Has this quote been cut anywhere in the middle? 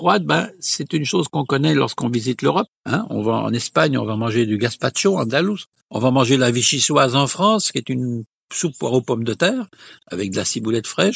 yes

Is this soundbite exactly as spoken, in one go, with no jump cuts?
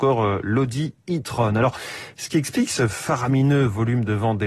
yes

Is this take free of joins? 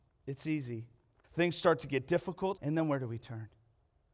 no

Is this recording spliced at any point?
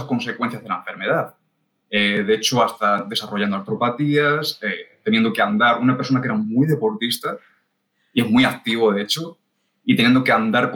no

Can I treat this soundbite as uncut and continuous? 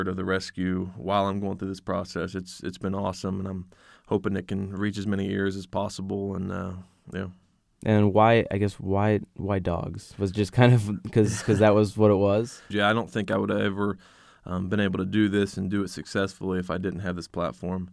no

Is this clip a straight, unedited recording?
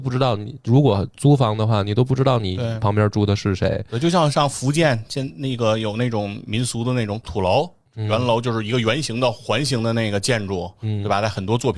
yes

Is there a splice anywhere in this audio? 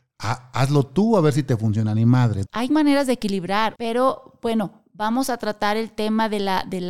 yes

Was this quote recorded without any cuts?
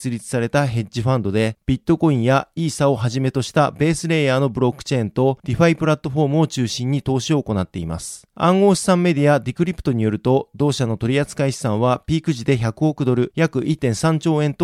yes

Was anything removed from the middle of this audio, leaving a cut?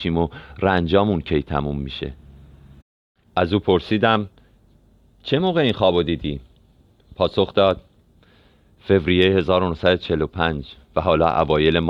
no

